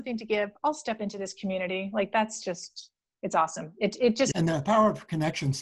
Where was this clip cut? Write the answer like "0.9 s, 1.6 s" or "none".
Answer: 4.3 s